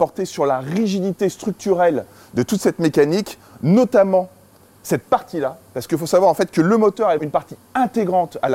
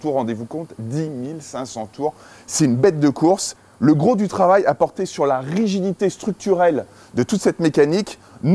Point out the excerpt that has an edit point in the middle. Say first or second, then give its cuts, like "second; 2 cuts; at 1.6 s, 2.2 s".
first; 1 cut; at 7.2 s